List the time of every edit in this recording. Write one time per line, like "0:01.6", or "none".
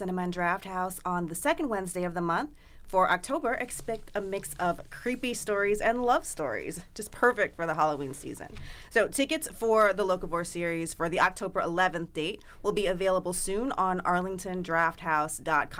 none